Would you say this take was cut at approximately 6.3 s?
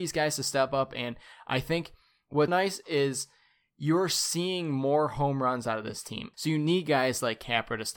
yes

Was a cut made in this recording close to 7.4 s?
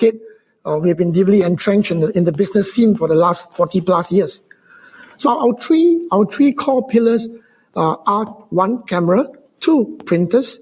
no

